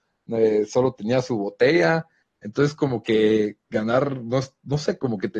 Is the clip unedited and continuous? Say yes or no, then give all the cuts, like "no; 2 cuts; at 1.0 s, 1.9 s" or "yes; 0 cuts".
no; 1 cut; at 2.2 s